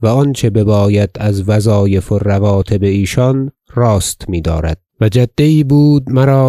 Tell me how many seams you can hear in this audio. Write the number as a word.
one